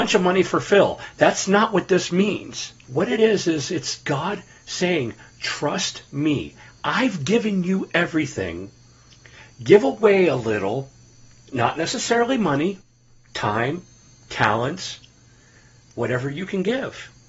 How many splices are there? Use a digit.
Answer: 0